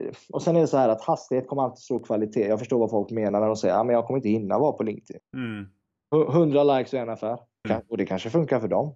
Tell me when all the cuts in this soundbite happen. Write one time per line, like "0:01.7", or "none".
0:05.2
0:07.6